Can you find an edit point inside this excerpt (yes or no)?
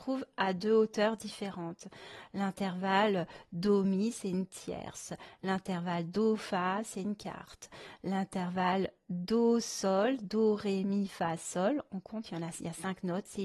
no